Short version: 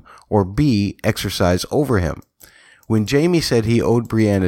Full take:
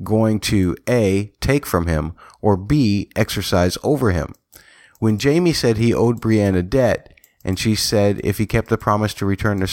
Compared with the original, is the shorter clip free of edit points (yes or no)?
yes